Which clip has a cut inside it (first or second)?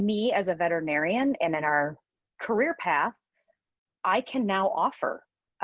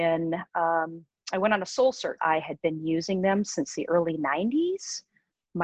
second